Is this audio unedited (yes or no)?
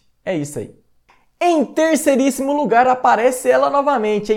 yes